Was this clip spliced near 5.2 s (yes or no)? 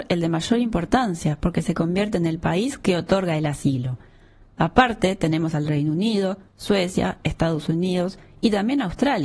no